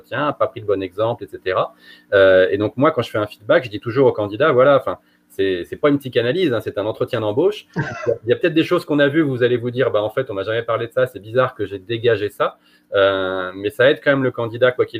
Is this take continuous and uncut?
yes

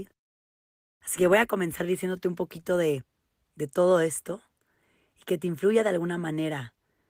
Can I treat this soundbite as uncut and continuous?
yes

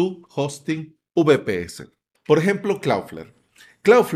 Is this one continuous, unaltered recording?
no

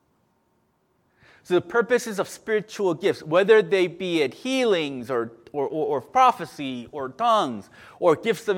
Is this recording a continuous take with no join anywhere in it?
yes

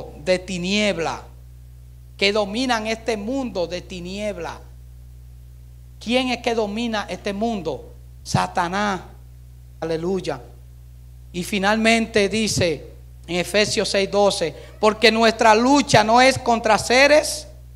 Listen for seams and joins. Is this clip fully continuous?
no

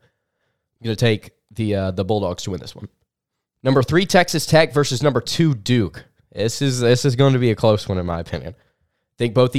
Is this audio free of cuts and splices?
yes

